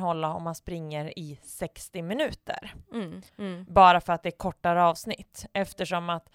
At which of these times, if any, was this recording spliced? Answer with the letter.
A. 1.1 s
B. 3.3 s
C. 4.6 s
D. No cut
B